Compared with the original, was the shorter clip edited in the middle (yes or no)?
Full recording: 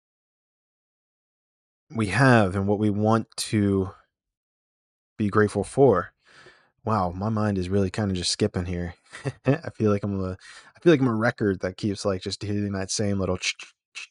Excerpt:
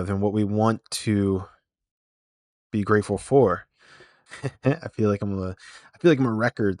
yes